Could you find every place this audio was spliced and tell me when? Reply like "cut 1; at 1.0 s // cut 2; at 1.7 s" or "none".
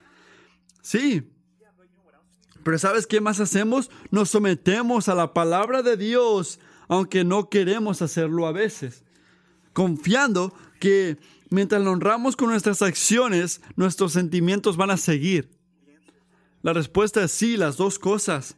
none